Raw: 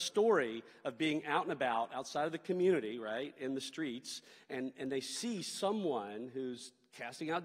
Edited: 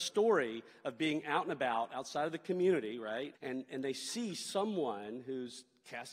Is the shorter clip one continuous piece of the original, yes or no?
no